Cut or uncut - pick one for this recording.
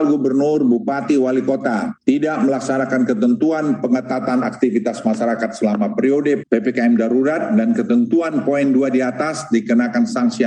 cut